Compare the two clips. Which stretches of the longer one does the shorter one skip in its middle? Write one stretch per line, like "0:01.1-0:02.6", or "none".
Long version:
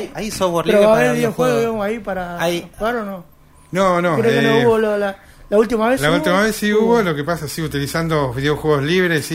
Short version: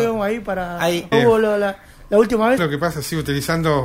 0:02.7-0:04.5
0:06.0-0:07.0